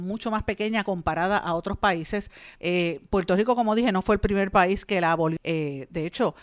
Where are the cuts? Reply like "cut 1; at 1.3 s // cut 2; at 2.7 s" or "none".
cut 1; at 2.6 s // cut 2; at 5.4 s